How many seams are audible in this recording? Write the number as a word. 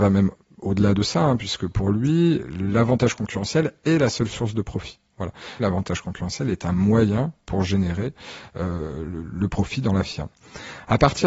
one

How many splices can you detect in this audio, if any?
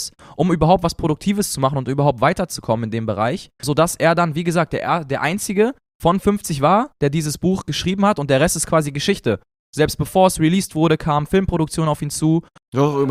one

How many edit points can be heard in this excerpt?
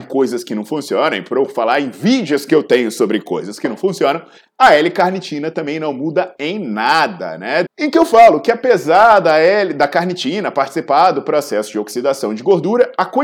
one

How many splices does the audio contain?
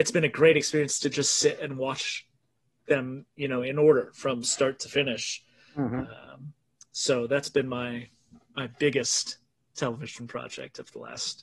zero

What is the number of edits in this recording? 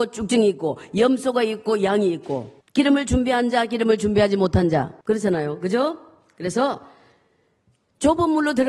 two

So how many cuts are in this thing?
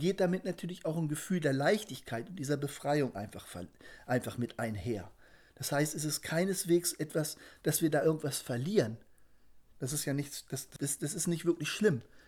two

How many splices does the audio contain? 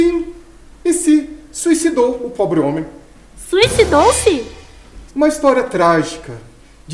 one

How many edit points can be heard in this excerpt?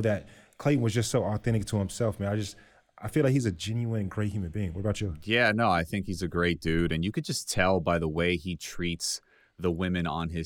zero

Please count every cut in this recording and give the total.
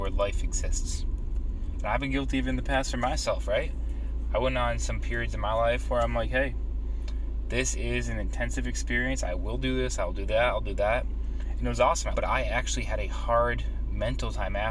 one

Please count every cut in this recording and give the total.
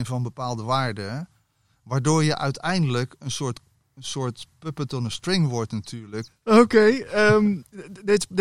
one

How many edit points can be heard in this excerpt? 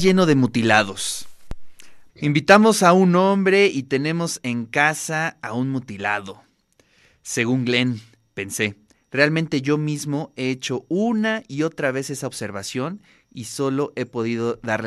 one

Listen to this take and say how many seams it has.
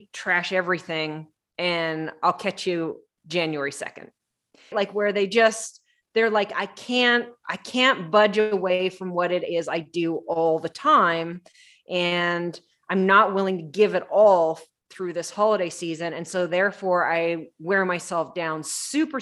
one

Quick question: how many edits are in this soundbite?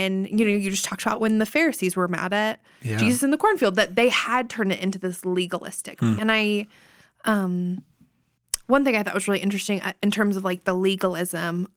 one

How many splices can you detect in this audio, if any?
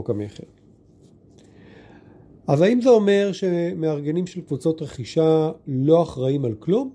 zero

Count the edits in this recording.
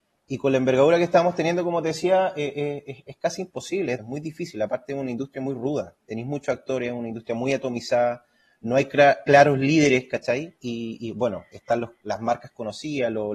two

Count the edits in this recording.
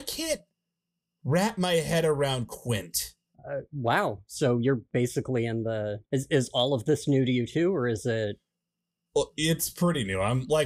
two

